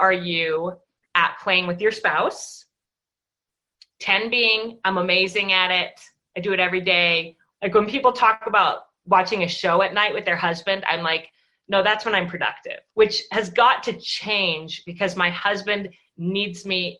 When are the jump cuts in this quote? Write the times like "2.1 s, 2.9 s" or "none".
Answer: 7.5 s, 12.9 s